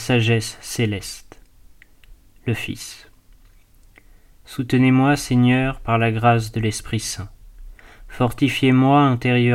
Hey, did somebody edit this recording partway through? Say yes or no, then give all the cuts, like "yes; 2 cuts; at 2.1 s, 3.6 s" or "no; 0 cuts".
no; 0 cuts